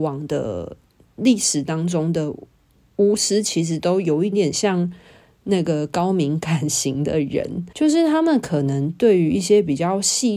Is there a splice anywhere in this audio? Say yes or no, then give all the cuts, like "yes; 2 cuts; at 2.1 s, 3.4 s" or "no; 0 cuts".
yes; 2 cuts; at 4.3 s, 7.7 s